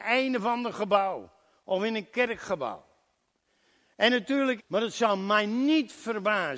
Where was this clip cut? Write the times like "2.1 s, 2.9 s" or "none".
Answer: 4.6 s